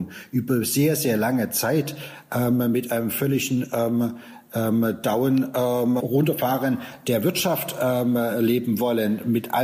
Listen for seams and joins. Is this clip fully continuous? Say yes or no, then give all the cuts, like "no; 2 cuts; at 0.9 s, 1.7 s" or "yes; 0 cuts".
no; 1 cut; at 6.0 s